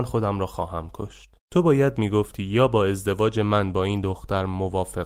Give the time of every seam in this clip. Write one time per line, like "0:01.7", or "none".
0:01.4